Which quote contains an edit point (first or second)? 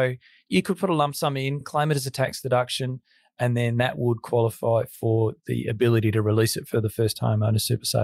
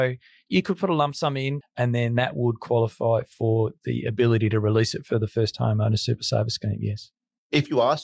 second